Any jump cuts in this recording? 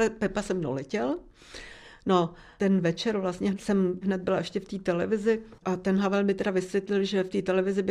yes; 1 cut; at 5.6 s

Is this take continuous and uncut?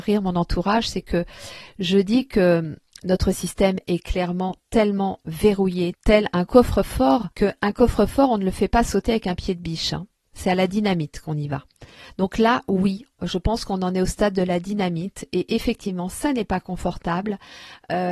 no; 2 cuts; at 5.9 s, 7.3 s

